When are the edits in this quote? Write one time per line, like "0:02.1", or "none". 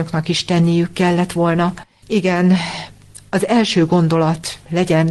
0:02.0